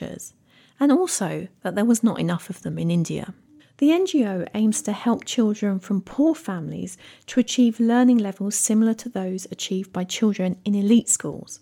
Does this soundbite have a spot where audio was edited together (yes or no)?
yes